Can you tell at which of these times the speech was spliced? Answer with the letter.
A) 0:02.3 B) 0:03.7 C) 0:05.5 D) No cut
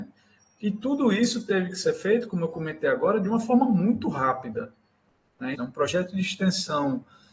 C